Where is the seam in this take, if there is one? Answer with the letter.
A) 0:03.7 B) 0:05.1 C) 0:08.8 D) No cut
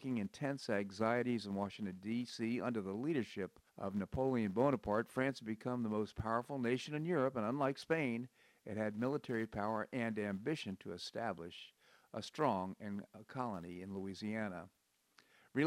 A